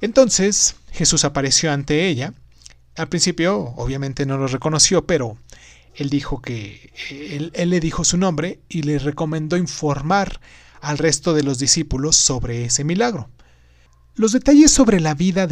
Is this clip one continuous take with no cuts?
yes; 0 cuts

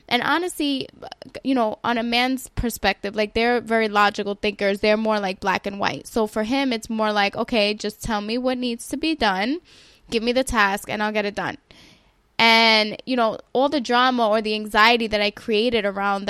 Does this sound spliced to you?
no; 0 cuts

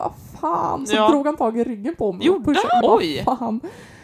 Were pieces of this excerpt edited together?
yes; 1 cut; at 2.8 s

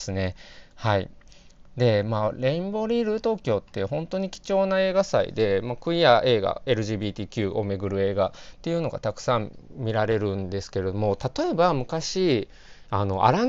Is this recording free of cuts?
yes; 0 cuts

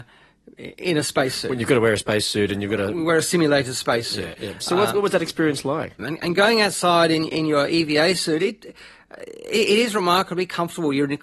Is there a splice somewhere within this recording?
yes; 1 cut; at 6.0 s

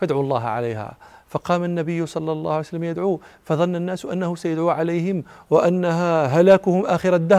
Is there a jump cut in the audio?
yes; 1 cut; at 5.5 s

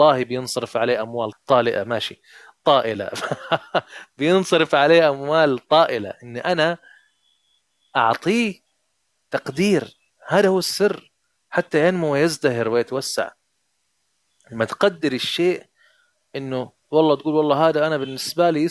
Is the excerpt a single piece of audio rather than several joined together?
no; 1 cut; at 1.3 s

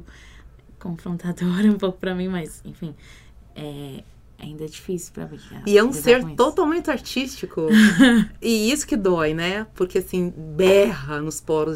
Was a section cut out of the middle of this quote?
no; 0 cuts

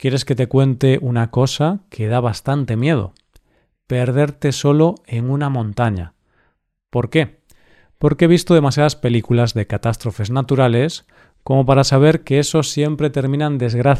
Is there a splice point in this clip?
no; 0 cuts

